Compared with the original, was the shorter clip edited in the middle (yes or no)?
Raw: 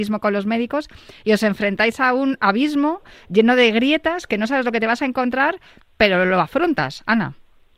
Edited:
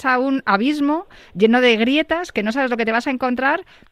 no